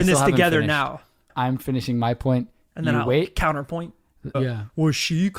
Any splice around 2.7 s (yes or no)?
no